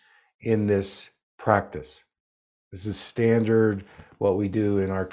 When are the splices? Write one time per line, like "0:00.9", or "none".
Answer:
none